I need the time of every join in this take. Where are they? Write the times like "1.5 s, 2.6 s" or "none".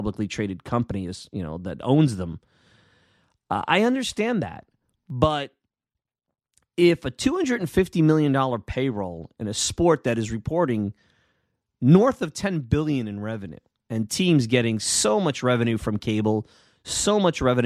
none